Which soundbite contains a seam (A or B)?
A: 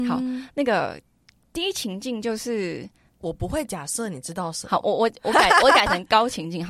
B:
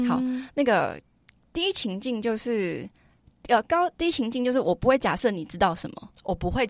A